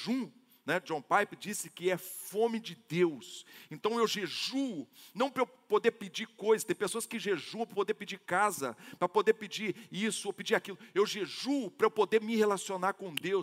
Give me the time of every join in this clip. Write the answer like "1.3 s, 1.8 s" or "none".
none